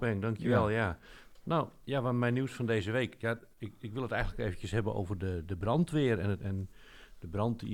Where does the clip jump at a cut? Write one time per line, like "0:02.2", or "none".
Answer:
0:06.4